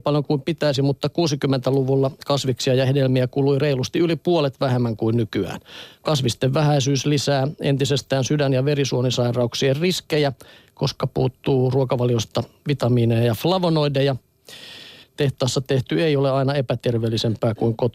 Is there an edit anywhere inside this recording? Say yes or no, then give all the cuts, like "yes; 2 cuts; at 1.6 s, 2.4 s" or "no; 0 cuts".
yes; 1 cut; at 15.0 s